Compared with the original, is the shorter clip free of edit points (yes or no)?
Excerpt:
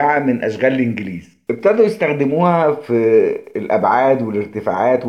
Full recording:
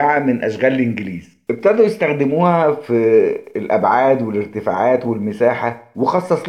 yes